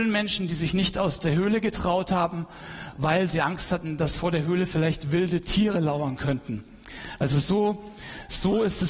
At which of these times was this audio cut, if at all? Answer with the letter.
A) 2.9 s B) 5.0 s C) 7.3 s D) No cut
D